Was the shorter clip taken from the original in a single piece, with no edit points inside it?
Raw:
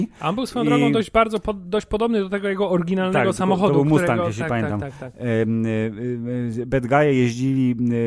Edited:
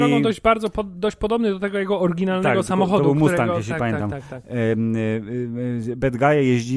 yes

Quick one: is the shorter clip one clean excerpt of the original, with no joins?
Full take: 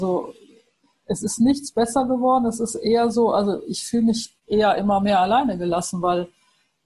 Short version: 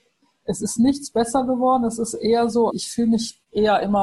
no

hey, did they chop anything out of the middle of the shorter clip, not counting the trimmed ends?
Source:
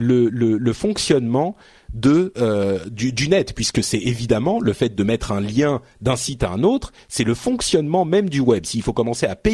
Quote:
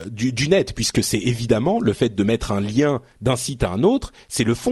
no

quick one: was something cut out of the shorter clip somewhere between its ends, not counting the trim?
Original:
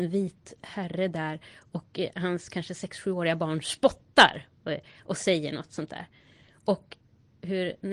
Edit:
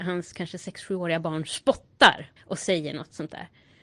yes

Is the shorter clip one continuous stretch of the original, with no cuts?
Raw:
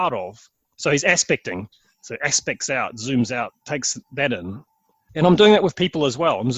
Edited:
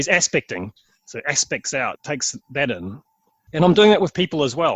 no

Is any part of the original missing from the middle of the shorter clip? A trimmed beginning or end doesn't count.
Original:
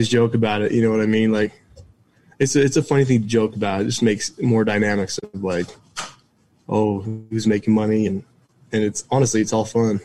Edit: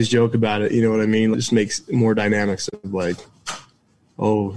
yes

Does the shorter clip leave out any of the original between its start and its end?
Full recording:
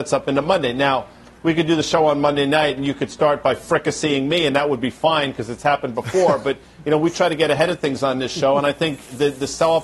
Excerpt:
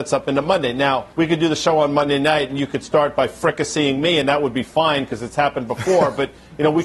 yes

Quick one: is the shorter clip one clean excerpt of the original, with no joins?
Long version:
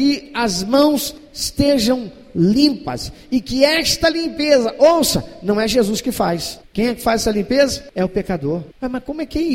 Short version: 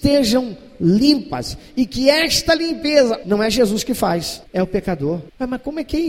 no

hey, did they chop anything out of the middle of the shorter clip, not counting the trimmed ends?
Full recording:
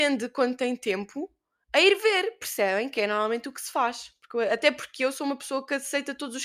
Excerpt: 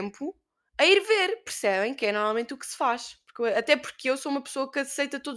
no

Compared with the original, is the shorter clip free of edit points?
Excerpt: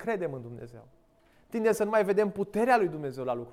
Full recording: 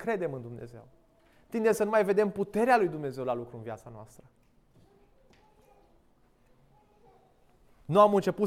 yes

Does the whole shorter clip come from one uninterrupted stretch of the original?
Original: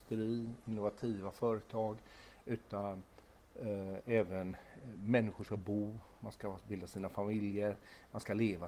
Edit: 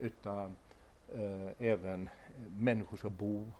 yes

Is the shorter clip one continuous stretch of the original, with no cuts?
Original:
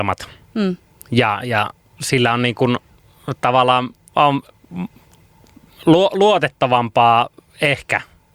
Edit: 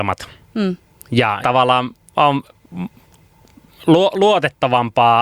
no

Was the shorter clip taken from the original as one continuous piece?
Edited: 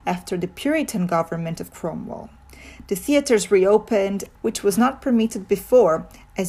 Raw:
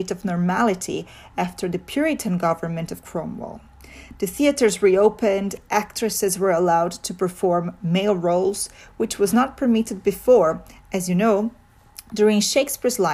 no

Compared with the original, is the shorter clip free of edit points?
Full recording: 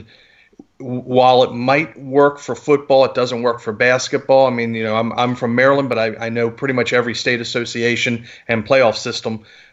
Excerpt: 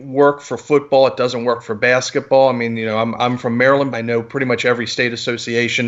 no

